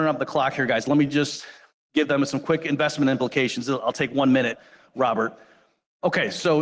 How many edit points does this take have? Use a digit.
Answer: 0